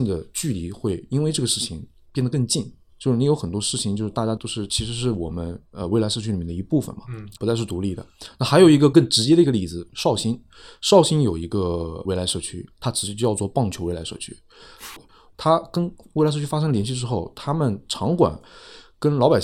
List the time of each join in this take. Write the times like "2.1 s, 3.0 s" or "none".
7.4 s, 15.0 s